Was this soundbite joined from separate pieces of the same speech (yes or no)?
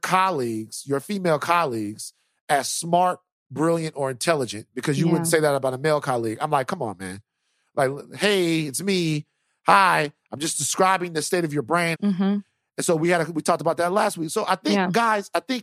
yes